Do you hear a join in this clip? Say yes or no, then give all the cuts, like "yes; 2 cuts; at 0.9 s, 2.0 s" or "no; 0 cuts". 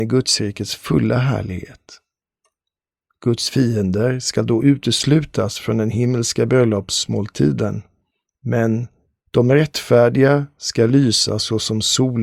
yes; 1 cut; at 9.2 s